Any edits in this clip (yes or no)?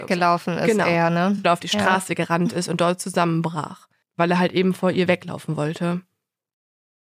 no